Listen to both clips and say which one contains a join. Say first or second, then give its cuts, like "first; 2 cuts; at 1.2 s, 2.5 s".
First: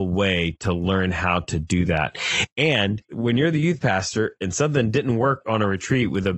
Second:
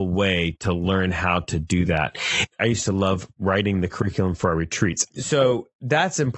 second; 2 cuts; at 2.5 s, 5.1 s